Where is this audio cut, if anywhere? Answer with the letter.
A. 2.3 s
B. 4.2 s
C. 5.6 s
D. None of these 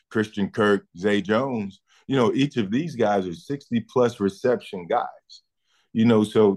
D